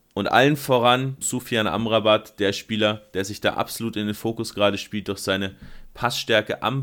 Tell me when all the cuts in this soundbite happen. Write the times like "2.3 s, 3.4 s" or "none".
1.2 s